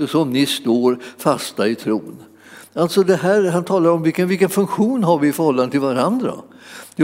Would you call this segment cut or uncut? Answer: uncut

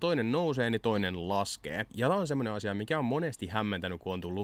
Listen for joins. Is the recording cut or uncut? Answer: uncut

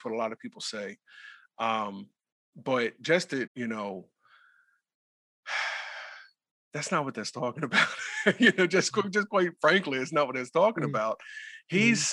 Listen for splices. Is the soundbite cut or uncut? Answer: cut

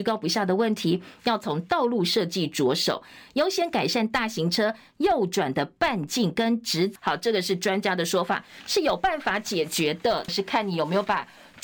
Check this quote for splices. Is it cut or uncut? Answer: cut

